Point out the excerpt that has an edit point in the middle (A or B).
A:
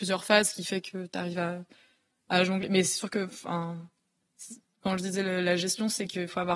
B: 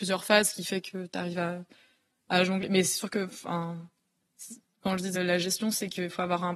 B